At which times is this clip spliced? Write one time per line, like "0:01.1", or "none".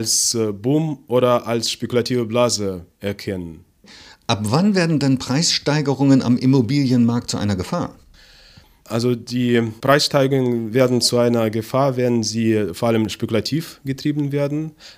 none